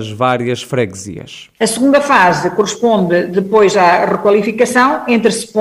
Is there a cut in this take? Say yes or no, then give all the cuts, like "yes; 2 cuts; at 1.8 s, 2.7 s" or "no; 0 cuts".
yes; 1 cut; at 1.6 s